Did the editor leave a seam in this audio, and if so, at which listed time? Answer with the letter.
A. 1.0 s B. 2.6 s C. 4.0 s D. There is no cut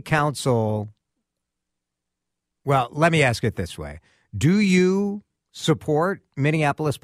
D